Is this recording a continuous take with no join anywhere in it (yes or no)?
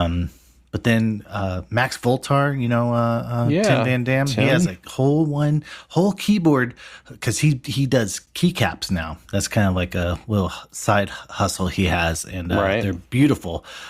yes